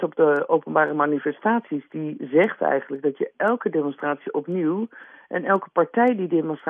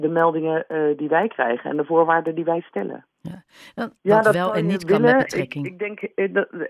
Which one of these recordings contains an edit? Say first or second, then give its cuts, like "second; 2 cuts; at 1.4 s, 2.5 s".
second; 1 cut; at 4.0 s